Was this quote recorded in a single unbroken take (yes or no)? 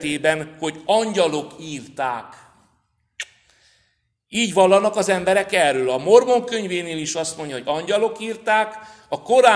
yes